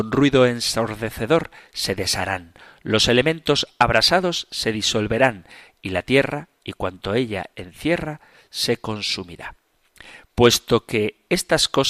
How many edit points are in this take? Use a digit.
0